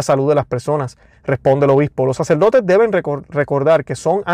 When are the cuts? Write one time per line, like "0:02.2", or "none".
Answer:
0:01.1